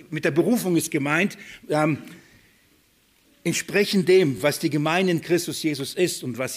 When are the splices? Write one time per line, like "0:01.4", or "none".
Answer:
none